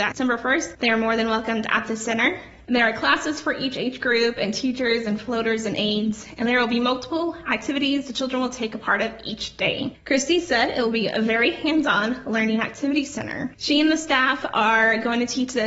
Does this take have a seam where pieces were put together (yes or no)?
yes